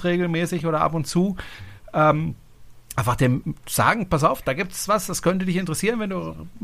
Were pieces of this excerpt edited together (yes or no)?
no